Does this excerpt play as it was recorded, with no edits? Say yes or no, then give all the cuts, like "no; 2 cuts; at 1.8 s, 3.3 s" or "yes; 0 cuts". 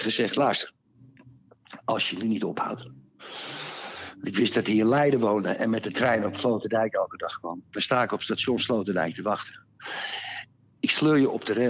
yes; 0 cuts